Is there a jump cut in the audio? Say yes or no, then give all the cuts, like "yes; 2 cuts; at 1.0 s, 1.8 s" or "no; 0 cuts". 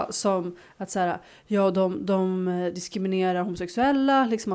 no; 0 cuts